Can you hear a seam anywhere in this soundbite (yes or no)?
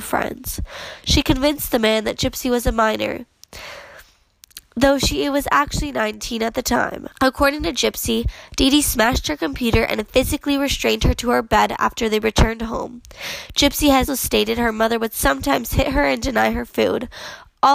yes